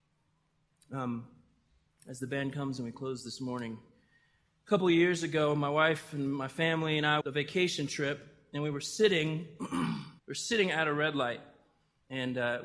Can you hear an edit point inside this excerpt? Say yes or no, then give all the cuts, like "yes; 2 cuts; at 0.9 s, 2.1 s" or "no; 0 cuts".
yes; 2 cuts; at 7.2 s, 10.2 s